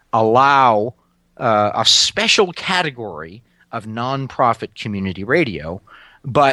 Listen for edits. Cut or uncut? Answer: uncut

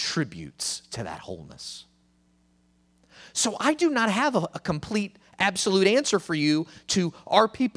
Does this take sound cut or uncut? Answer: uncut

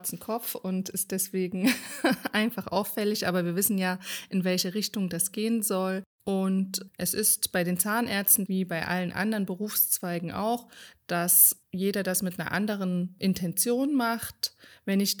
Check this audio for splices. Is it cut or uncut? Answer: cut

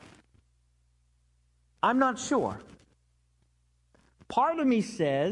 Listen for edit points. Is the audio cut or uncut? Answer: uncut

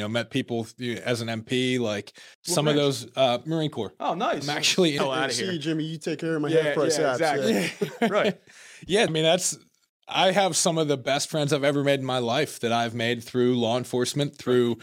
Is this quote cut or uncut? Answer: cut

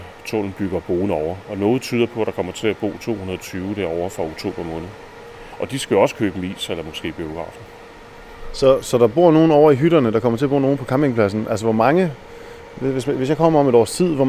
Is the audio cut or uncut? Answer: uncut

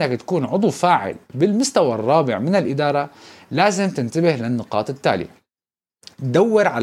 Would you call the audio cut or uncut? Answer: uncut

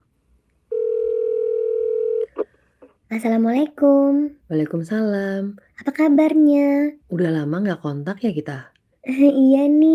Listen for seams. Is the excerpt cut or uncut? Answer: cut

